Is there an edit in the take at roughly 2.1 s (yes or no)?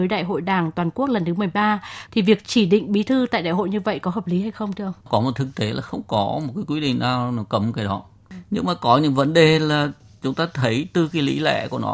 yes